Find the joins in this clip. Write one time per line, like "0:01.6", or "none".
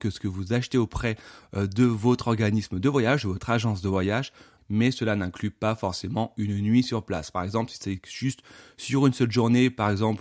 0:04.6